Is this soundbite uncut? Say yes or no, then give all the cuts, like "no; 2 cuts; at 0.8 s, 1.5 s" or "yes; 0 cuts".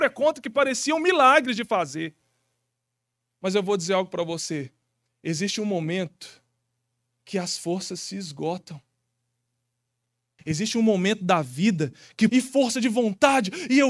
no; 2 cuts; at 10.4 s, 12.3 s